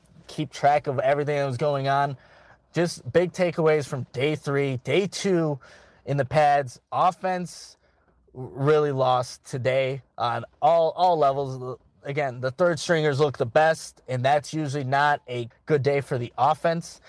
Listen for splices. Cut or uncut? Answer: cut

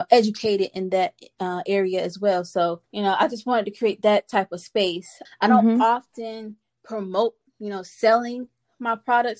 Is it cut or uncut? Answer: cut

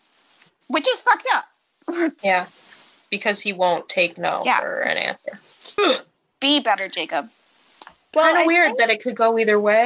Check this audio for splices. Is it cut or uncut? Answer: cut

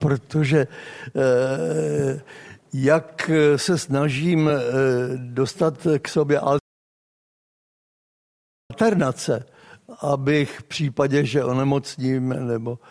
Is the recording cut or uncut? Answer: uncut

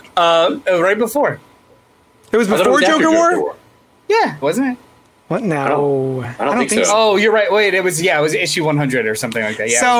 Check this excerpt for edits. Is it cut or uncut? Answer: cut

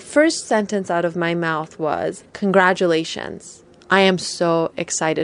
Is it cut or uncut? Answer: cut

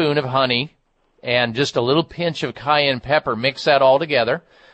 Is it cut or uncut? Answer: uncut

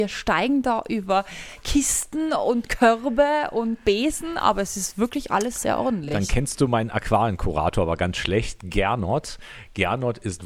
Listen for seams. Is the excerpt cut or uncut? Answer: uncut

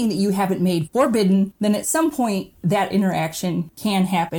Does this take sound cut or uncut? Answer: cut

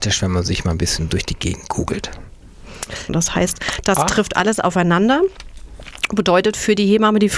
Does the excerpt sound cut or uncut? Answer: cut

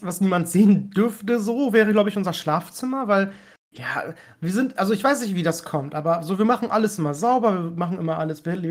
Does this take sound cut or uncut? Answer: uncut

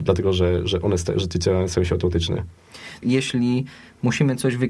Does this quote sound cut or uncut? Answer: cut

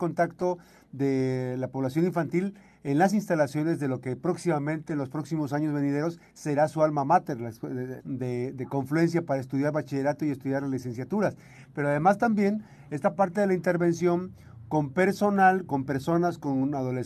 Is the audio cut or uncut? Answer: cut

